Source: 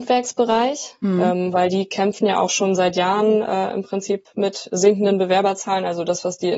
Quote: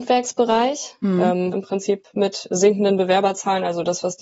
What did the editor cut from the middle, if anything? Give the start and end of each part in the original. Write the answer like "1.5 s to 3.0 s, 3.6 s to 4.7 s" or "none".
1.5 s to 3.7 s